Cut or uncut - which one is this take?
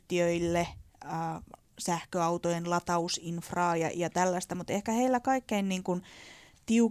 uncut